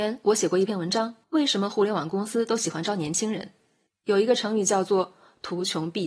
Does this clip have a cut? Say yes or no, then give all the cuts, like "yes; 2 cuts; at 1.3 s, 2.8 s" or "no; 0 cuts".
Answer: yes; 2 cuts; at 1.2 s, 3.9 s